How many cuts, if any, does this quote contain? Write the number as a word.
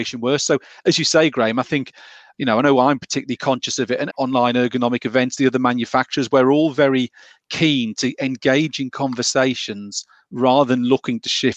one